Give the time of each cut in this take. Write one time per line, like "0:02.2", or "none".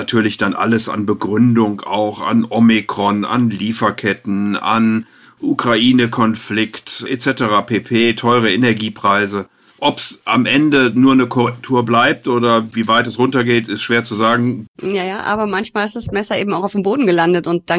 0:09.8
0:14.7